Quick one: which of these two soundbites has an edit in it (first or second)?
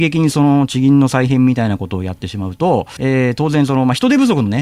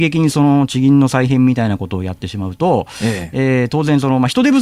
first